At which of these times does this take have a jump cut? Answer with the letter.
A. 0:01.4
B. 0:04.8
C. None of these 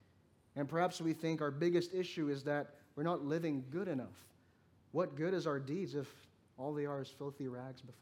B